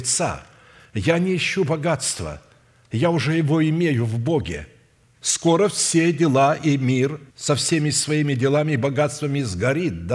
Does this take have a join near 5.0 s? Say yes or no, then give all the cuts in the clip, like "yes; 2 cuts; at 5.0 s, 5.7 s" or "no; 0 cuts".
yes; 2 cuts; at 5.0 s, 7.3 s